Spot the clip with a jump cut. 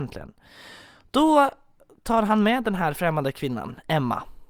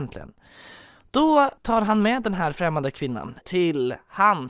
second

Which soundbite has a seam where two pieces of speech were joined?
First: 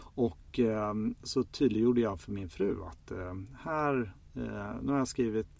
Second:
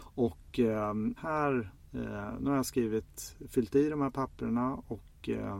second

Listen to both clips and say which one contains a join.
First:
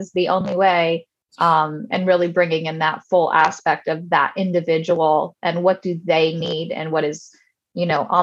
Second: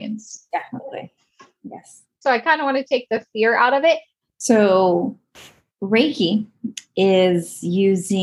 second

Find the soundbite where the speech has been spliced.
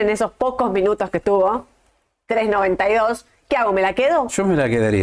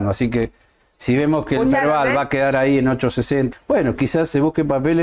second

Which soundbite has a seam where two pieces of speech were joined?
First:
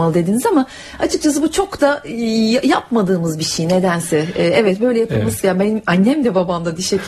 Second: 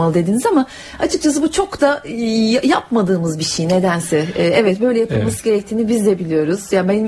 first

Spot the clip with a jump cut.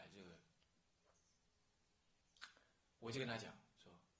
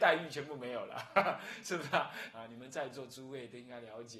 second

